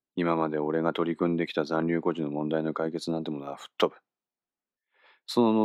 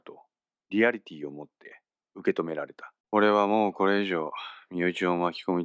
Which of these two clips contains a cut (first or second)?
second